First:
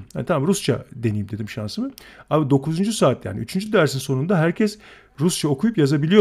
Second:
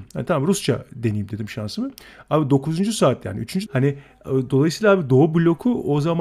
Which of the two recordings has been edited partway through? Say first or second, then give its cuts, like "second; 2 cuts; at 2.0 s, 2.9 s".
second; 1 cut; at 3.7 s